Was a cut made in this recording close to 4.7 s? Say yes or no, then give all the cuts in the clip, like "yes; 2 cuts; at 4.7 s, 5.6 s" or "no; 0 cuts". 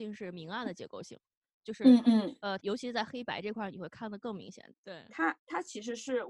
yes; 2 cuts; at 2.6 s, 4.7 s